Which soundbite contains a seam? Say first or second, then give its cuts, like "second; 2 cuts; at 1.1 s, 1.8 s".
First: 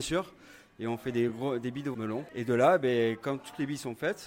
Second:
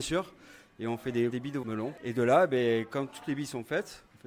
second; 1 cut; at 1.3 s